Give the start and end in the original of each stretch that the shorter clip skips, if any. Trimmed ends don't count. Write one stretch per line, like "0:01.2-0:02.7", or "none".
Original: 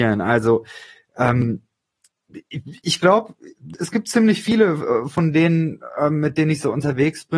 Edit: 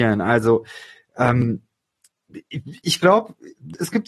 none